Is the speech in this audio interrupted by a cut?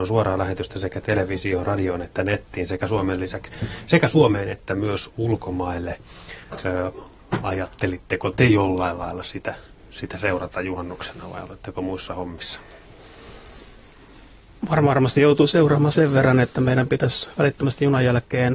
no; 0 cuts

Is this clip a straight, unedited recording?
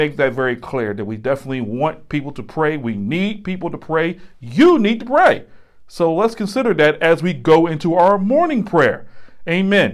yes; 0 cuts

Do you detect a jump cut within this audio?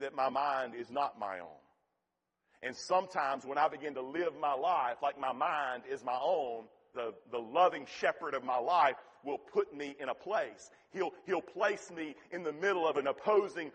yes; 1 cut; at 6.9 s

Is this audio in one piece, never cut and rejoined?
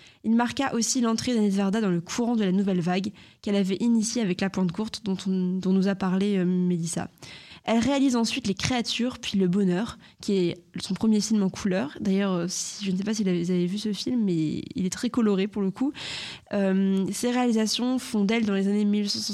yes; 0 cuts

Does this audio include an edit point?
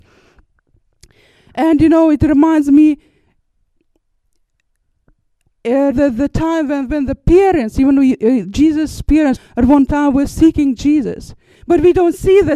yes; 3 cuts; at 5.9 s, 9.4 s, 11.5 s

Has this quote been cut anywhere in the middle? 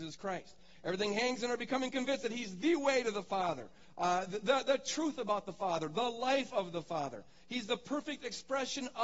no; 0 cuts

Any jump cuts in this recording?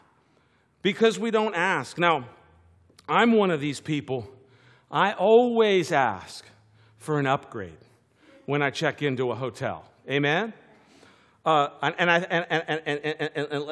no; 0 cuts

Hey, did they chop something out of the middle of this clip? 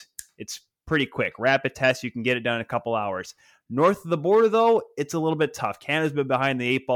no; 0 cuts

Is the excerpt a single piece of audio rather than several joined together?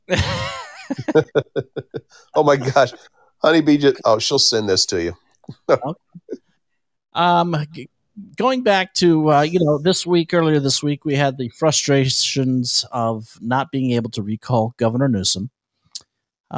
yes; 0 cuts

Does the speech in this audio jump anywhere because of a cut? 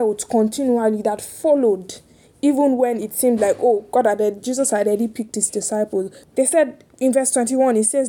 yes; 1 cut; at 6.2 s

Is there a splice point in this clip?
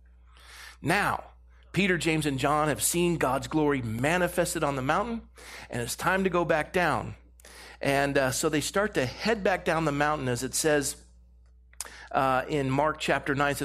no; 0 cuts

